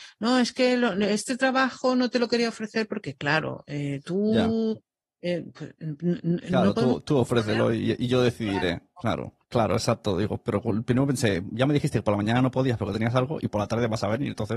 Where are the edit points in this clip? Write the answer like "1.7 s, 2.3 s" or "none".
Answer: 9.4 s